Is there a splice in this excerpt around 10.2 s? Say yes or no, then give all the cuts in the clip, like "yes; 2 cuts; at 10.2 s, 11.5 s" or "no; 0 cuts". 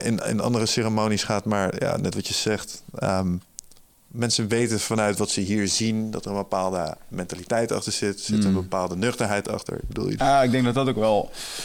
yes; 1 cut; at 10.2 s